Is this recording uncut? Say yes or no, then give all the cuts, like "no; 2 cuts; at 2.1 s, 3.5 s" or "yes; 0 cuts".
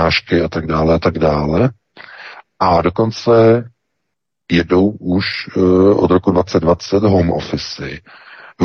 yes; 0 cuts